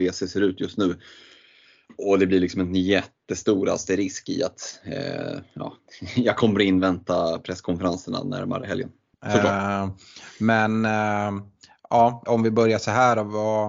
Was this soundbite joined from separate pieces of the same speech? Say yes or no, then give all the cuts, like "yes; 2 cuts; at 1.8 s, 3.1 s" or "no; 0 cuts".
yes; 2 cuts; at 9.1 s, 12.3 s